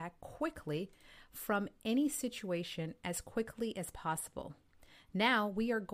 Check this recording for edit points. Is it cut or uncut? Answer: uncut